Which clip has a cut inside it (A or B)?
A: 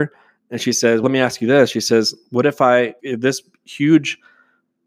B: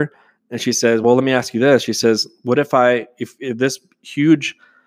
A